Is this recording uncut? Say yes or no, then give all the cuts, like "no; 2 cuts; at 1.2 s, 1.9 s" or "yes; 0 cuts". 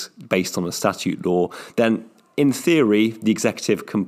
yes; 0 cuts